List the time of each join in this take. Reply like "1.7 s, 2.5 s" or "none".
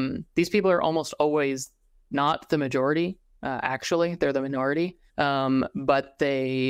5.1 s